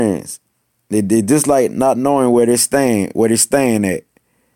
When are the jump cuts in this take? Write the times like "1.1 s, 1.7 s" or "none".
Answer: none